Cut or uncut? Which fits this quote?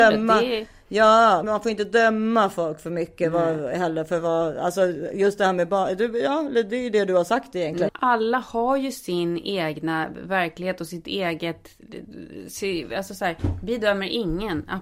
cut